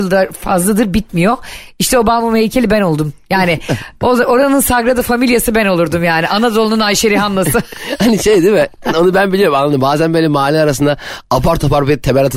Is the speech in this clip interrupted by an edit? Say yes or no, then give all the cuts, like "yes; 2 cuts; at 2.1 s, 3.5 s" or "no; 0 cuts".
no; 0 cuts